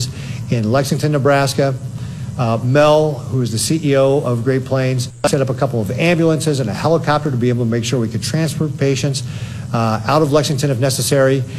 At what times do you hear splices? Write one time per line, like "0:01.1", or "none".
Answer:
none